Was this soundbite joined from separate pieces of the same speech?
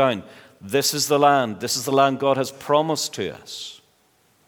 no; 0 cuts

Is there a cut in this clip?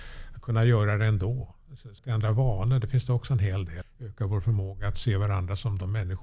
yes; 2 cuts; at 2.0 s, 3.8 s

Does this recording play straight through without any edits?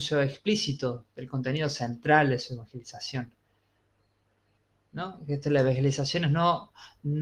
yes; 0 cuts

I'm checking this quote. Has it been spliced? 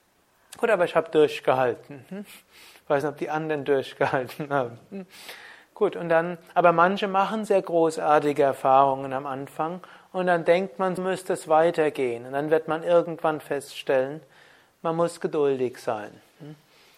yes; 1 cut; at 11.0 s

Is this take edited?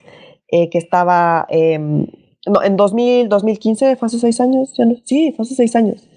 no; 0 cuts

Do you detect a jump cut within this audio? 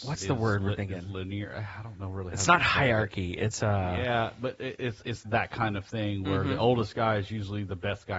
yes; 1 cut; at 5.2 s

